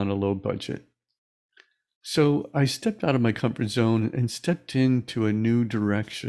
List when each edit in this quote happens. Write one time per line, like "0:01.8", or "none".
0:02.0